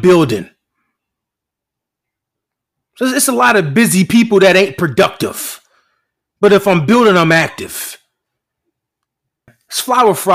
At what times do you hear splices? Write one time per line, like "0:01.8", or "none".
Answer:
none